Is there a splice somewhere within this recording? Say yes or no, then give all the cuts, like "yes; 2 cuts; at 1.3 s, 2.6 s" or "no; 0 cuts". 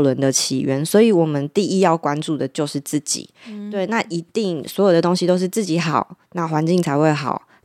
no; 0 cuts